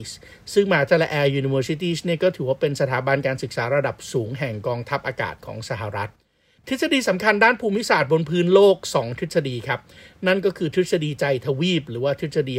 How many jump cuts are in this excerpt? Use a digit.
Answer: 0